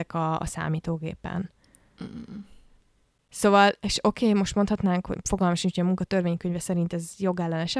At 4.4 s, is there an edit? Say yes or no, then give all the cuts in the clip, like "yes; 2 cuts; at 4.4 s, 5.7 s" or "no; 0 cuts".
no; 0 cuts